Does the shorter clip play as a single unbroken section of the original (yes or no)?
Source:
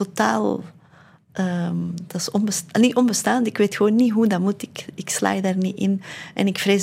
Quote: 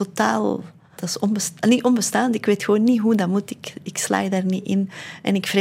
no